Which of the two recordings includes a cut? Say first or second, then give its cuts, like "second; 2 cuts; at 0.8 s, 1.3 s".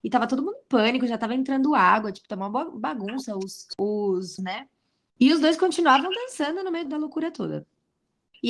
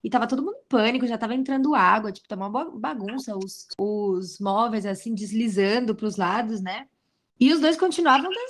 first; 2 cuts; at 4.4 s, 6.9 s